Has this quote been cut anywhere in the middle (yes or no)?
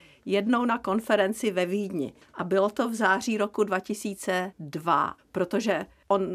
yes